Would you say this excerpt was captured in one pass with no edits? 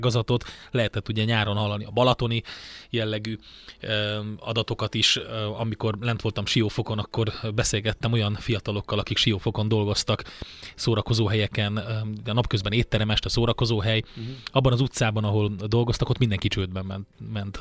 yes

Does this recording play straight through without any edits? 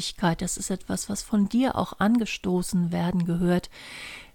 yes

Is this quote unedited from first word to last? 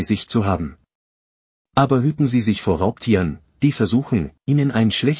yes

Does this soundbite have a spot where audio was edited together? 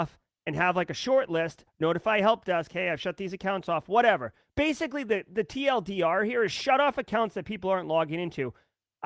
no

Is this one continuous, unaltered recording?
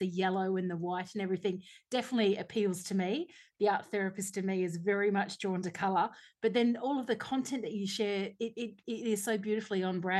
yes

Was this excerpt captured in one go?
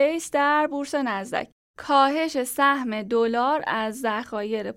no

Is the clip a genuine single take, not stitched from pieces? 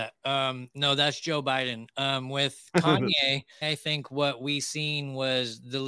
no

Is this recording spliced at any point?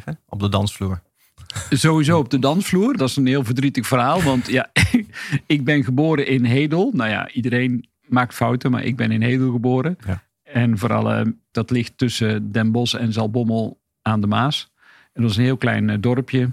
yes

